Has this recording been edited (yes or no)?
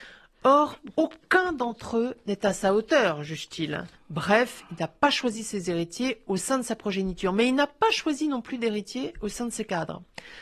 yes